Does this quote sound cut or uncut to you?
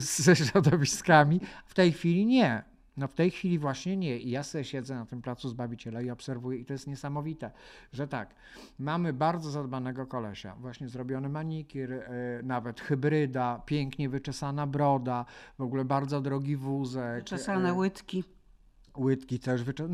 uncut